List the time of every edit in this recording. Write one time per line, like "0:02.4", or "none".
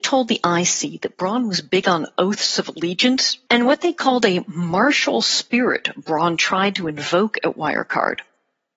0:03.5